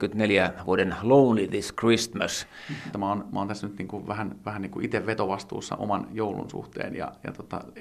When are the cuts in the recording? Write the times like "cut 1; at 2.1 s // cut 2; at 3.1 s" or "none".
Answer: cut 1; at 2.9 s